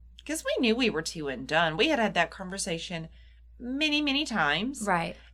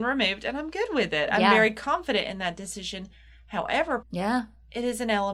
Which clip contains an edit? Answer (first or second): second